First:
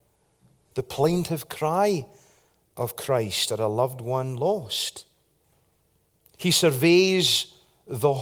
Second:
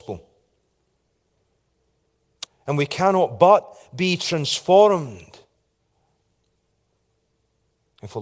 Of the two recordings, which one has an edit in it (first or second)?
second